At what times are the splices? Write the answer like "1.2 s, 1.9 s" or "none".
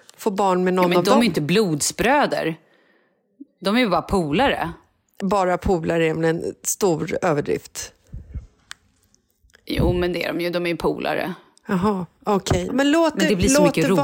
5.2 s, 12.7 s